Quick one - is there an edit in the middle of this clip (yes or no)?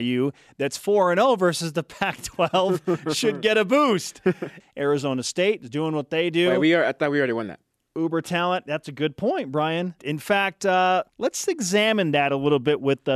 yes